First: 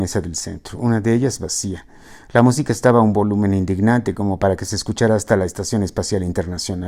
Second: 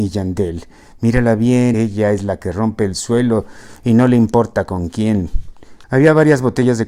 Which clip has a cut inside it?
second; 2 cuts; at 1.7 s, 5.8 s

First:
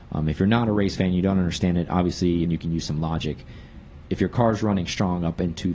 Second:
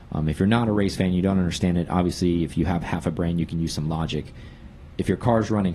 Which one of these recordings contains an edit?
first; 1 cut; at 2.4 s

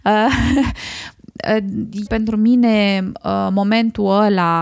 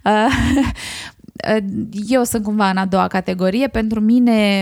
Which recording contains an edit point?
first; 1 cut; at 2.1 s

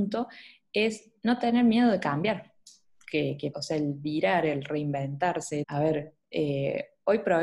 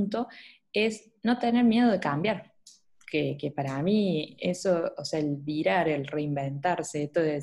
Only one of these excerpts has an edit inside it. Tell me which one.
first; 2 cuts; at 3.5 s, 5.6 s

